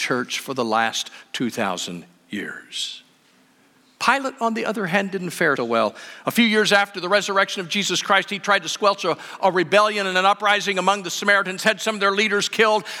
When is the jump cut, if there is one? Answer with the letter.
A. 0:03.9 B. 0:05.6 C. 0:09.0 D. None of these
B